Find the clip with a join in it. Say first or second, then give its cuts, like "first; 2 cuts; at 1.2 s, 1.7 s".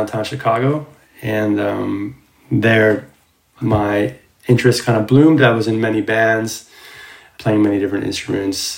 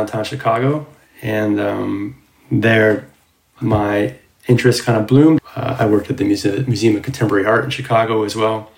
second; 1 cut; at 5.4 s